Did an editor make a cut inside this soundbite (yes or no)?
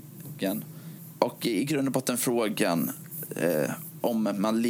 no